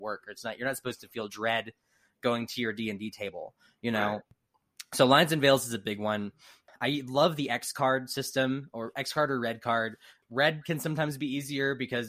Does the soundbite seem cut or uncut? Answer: uncut